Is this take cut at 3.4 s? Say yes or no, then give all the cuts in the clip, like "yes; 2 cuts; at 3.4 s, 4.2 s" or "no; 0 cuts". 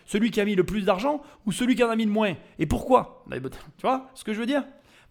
no; 0 cuts